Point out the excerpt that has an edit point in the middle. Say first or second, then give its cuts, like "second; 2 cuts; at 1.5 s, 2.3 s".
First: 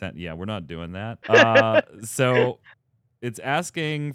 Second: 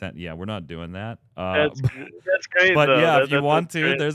first; 1 cut; at 1.2 s